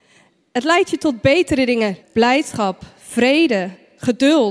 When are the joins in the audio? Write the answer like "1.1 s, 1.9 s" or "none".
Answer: 2.0 s